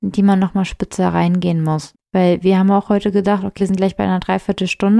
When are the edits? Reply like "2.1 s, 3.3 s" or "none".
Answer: 1.9 s, 3.6 s